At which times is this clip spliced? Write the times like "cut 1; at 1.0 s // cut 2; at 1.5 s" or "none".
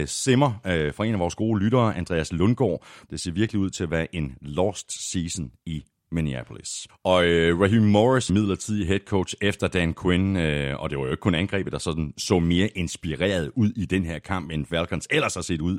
cut 1; at 3.1 s // cut 2; at 6.9 s // cut 3; at 8.3 s